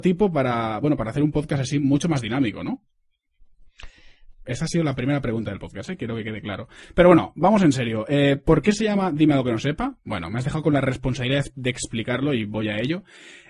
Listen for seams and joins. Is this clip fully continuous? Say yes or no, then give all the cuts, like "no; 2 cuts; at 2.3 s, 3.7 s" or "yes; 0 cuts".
no; 1 cut; at 4.4 s